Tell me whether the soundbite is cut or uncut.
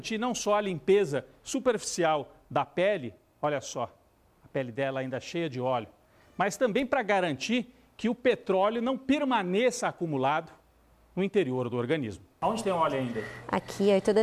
uncut